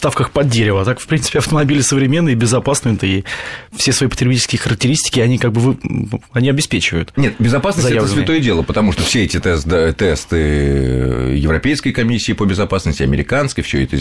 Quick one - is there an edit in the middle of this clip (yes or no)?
yes